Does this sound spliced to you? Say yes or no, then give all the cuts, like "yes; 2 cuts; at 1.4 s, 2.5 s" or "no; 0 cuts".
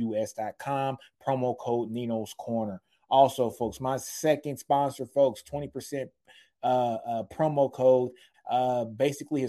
yes; 1 cut; at 8.3 s